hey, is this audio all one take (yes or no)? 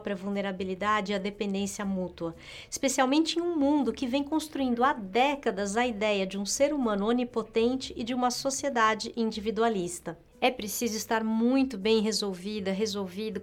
yes